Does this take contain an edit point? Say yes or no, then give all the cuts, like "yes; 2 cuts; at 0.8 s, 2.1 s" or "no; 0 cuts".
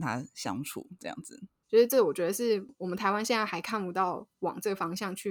yes; 1 cut; at 1.6 s